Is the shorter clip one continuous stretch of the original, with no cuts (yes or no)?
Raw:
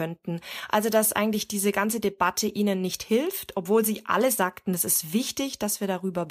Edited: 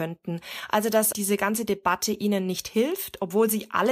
no